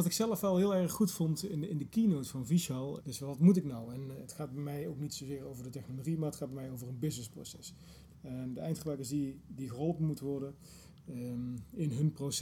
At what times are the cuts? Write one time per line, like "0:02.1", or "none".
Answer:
0:03.0
0:08.1